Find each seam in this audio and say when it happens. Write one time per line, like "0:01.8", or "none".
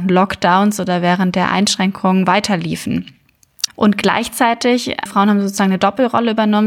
0:03.7
0:05.1